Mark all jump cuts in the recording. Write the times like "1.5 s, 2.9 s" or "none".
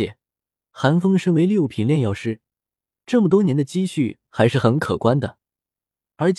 none